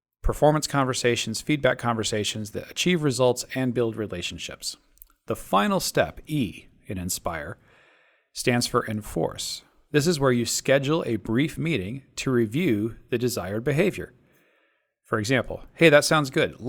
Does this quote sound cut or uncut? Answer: uncut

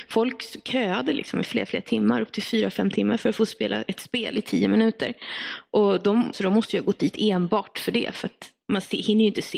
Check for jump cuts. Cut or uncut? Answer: cut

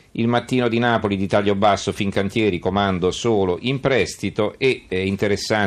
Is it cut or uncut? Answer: uncut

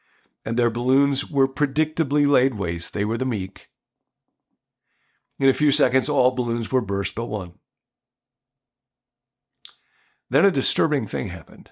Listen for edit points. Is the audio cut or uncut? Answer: uncut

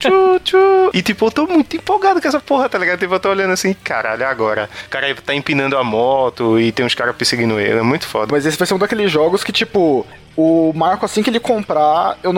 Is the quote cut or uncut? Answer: cut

